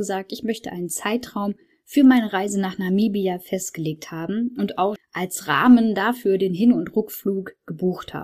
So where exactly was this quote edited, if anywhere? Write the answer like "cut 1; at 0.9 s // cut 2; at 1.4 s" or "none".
cut 1; at 5.0 s